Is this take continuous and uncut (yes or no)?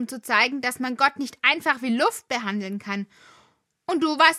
yes